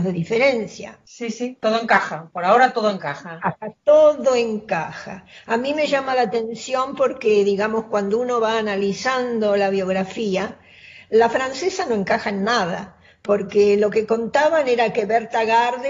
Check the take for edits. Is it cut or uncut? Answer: uncut